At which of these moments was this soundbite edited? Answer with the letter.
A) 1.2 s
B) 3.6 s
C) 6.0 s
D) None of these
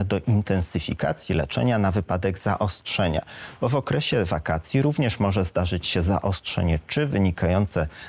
D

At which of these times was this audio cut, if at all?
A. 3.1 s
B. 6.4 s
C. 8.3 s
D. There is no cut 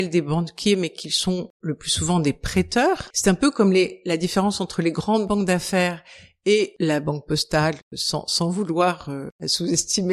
A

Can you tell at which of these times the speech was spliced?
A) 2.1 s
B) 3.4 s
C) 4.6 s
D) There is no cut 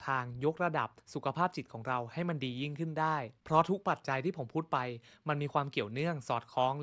B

